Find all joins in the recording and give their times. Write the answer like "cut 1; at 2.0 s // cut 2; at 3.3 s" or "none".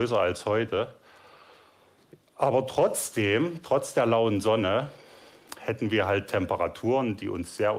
none